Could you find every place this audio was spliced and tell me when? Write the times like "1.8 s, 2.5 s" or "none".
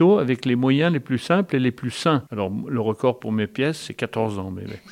2.3 s, 3.8 s